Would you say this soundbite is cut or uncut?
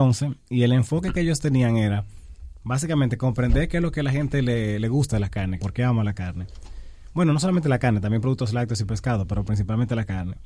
cut